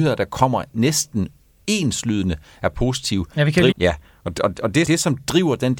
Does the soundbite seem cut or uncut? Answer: cut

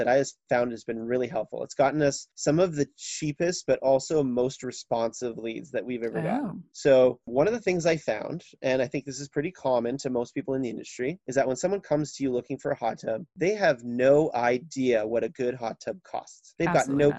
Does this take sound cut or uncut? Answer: uncut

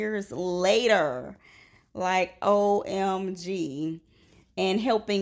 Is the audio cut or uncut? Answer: uncut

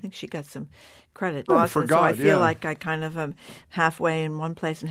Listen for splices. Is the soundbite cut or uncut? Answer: cut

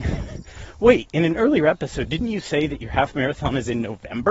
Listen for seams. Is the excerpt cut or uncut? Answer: uncut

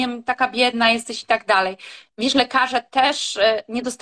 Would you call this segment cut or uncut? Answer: cut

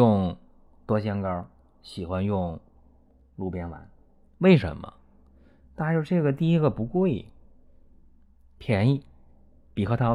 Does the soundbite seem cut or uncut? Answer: uncut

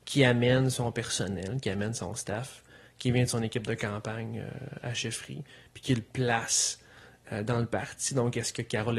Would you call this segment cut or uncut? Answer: uncut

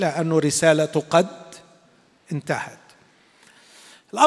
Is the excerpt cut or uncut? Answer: uncut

